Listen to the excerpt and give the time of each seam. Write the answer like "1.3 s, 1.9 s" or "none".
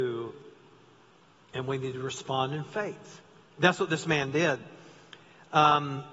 none